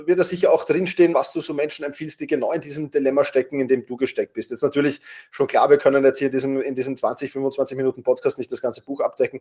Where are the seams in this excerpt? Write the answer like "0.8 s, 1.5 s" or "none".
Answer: 1.1 s